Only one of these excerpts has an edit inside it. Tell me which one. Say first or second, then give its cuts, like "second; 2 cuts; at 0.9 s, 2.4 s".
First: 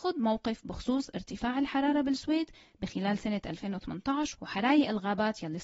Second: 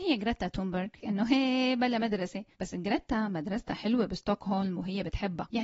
second; 2 cuts; at 1.0 s, 2.5 s